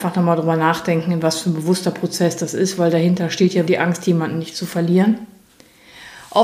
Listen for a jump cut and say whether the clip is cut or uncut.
cut